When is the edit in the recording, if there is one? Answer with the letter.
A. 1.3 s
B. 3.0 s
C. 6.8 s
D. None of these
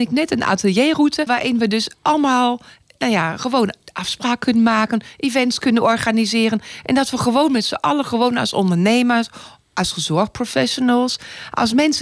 A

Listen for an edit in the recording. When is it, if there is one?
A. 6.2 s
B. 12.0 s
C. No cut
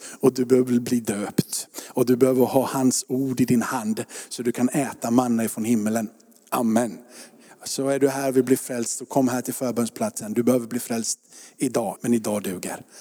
B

